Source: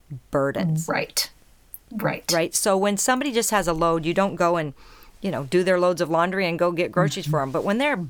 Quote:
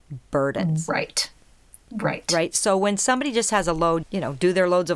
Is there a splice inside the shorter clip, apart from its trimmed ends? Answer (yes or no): yes